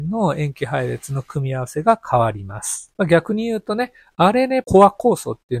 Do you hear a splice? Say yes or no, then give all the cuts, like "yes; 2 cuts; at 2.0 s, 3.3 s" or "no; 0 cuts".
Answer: yes; 2 cuts; at 2.9 s, 4.6 s